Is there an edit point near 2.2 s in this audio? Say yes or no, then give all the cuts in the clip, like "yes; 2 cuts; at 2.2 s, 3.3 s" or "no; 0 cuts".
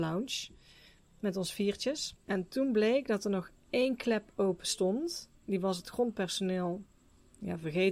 yes; 1 cut; at 2.2 s